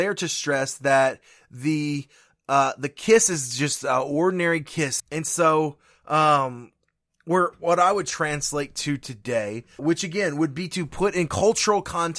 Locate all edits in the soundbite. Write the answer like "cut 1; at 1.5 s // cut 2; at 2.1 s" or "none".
cut 1; at 5.0 s // cut 2; at 9.8 s